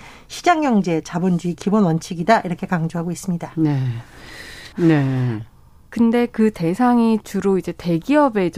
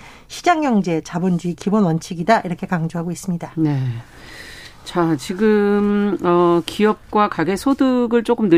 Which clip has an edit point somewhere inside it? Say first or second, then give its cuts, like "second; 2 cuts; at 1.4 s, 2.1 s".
first; 1 cut; at 4.7 s